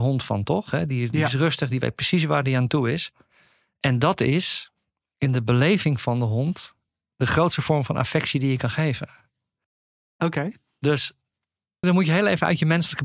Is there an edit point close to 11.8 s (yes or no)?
yes